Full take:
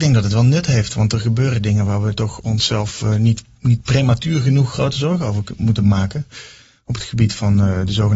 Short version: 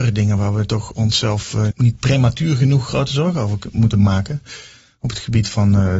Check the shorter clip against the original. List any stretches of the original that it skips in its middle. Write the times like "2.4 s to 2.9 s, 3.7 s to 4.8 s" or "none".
3.2 s to 3.6 s